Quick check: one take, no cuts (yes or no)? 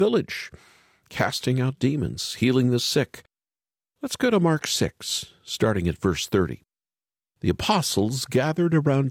yes